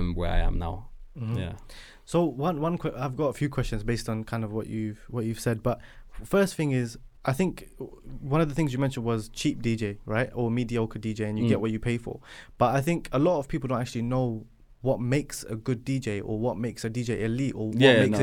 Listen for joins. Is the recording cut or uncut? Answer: cut